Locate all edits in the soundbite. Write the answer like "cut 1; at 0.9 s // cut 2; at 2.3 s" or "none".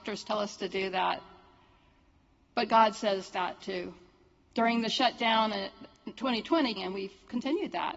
cut 1; at 6.8 s